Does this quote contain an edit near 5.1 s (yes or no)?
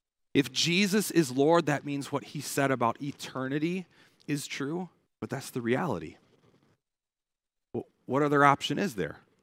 yes